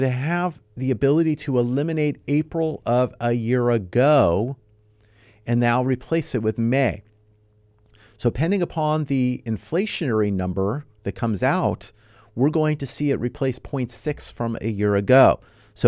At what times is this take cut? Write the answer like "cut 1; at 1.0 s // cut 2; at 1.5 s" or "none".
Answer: none